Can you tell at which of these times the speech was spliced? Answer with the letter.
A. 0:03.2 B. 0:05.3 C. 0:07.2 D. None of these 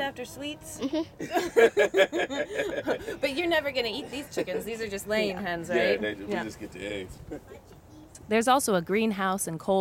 D